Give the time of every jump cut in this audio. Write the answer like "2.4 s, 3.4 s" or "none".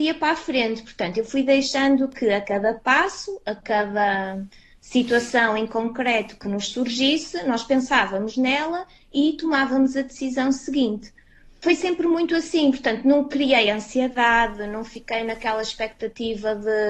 none